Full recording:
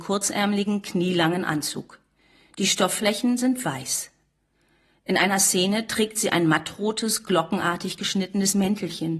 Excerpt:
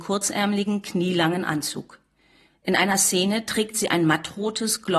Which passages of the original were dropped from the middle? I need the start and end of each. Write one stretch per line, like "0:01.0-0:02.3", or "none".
0:02.5-0:04.9